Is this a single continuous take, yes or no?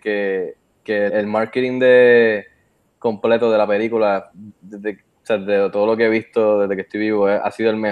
no